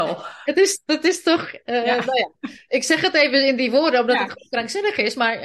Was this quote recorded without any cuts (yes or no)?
yes